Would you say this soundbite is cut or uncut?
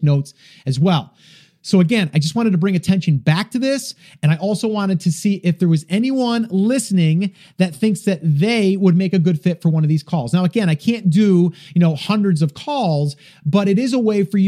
uncut